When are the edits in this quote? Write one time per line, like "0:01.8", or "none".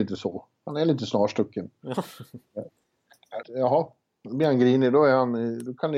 0:03.4